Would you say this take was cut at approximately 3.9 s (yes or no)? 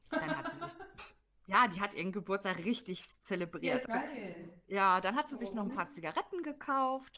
yes